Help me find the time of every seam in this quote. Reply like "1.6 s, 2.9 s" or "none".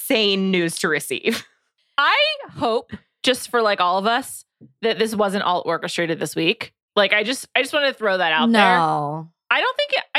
none

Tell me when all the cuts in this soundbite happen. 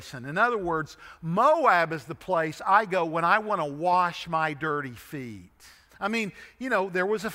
5.9 s

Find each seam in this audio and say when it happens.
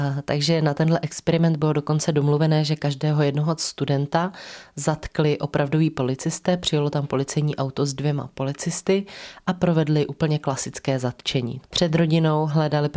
11.6 s

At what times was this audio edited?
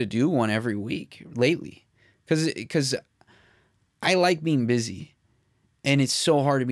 none

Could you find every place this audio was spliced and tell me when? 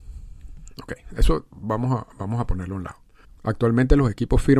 3.2 s

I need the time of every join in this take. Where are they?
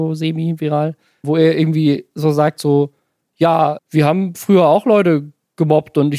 3.8 s

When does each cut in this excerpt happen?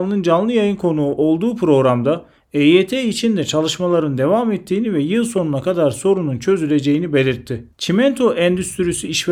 7.7 s

